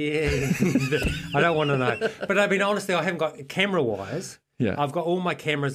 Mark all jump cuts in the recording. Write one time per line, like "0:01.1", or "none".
none